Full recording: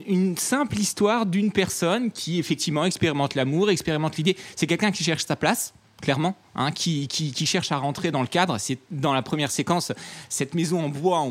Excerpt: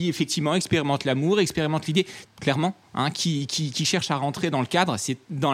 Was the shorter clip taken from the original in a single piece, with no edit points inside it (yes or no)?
no